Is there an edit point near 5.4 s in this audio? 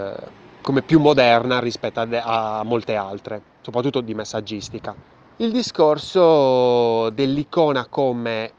yes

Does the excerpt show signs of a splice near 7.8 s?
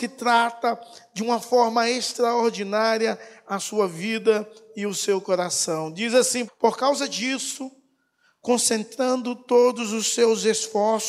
no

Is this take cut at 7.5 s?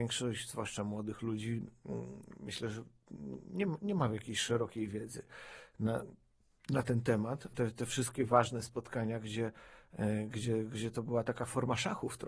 yes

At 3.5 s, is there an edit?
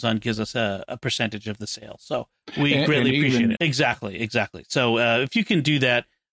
yes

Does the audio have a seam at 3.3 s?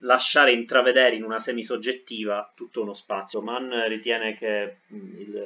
yes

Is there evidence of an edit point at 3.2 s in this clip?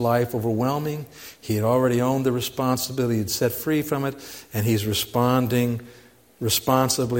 no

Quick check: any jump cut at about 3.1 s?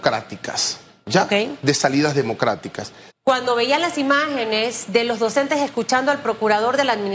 yes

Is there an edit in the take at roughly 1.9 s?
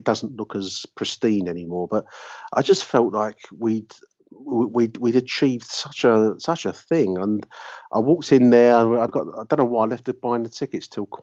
no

